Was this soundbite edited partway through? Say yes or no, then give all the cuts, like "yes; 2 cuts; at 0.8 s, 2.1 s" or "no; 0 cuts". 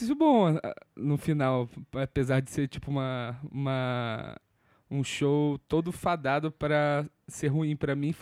no; 0 cuts